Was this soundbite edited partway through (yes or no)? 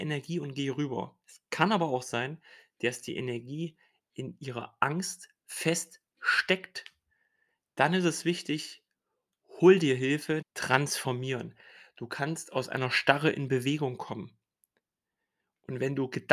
yes